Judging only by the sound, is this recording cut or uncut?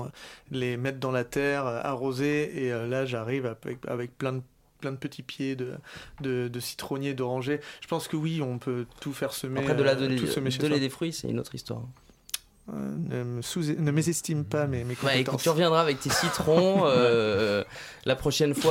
uncut